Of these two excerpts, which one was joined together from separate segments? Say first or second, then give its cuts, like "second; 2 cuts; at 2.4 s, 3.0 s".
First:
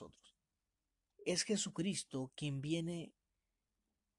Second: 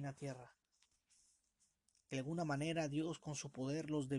first; 1 cut; at 1.1 s